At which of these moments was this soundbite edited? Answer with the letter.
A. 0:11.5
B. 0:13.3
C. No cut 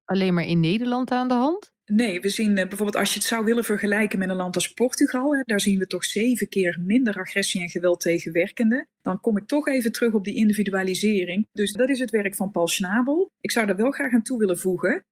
A